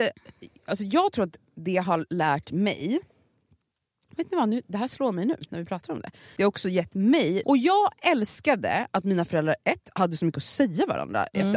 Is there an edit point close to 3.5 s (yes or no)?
no